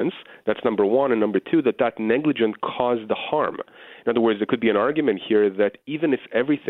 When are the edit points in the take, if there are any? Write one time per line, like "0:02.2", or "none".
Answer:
none